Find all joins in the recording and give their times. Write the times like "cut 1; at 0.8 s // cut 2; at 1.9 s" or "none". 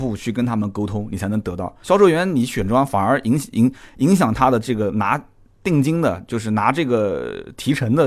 cut 1; at 1.8 s